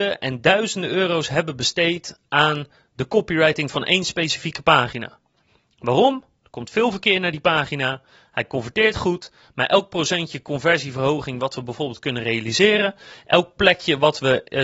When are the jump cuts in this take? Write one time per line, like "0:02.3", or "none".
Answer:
none